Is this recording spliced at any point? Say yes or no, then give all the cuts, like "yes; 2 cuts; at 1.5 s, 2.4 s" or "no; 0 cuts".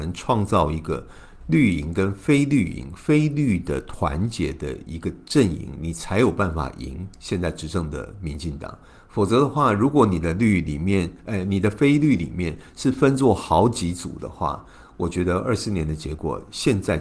no; 0 cuts